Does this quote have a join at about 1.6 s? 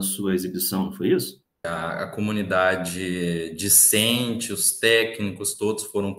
yes; 1 cut; at 1.6 s

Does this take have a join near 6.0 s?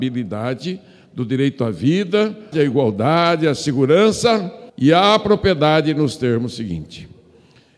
no; 2 cuts; at 2.5 s, 4.7 s

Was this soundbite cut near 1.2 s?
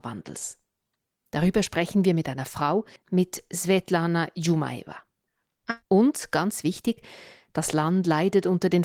no; 2 cuts; at 3.0 s, 5.8 s

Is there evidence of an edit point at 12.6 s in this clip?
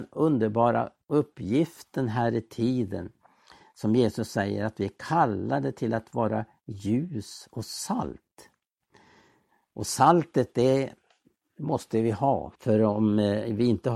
yes; 1 cut; at 12.6 s

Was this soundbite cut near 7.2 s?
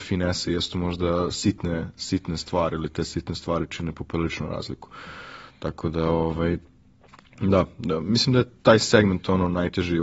no; 0 cuts

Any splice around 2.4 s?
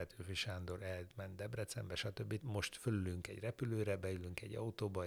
yes; 1 cut; at 2.4 s

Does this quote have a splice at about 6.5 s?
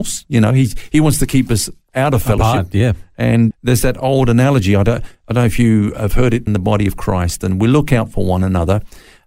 yes; 2 cuts; at 3.5 s, 6.5 s

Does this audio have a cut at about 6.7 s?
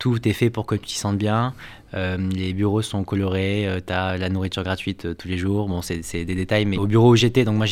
yes; 1 cut; at 6.7 s

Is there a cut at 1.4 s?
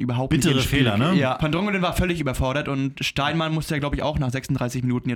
yes; 1 cut; at 1.4 s

